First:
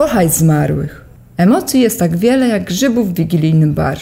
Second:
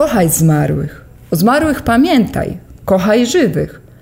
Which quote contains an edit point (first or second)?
first